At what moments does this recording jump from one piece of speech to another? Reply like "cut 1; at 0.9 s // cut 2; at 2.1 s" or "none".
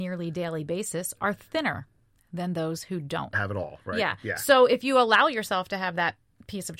cut 1; at 3.3 s

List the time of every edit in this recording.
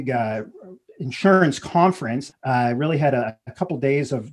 cut 1; at 2.3 s

